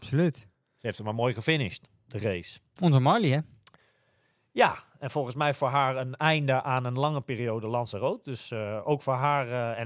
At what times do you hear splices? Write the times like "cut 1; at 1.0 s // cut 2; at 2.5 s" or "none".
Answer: none